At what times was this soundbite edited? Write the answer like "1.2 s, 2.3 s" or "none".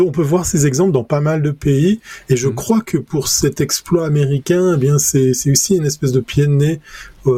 none